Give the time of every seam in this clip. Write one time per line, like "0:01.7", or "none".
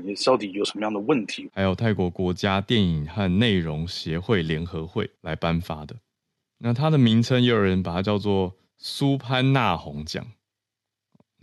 0:01.5
0:05.2